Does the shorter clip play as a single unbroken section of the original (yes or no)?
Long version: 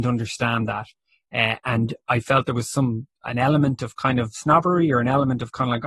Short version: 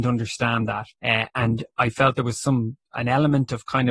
no